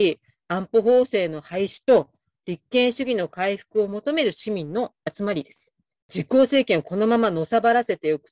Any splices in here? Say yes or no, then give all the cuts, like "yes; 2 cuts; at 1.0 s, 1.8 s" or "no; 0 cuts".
yes; 1 cut; at 6.0 s